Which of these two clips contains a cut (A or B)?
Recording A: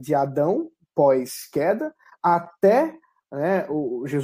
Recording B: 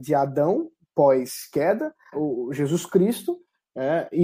B